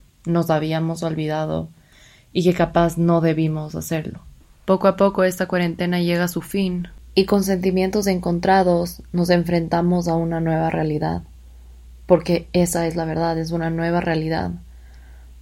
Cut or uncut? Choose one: uncut